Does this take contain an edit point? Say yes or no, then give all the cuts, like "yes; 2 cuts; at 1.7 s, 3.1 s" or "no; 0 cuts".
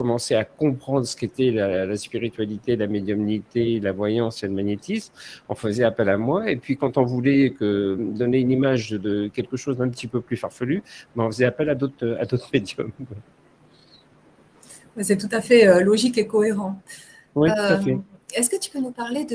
no; 0 cuts